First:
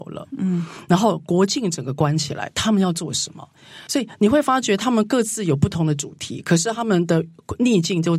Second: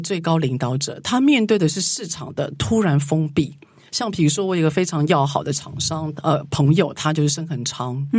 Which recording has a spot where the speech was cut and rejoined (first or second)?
first